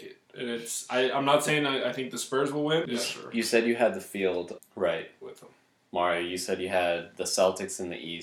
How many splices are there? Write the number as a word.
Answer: two